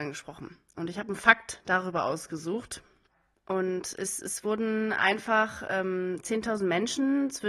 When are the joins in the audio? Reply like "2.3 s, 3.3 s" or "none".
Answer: none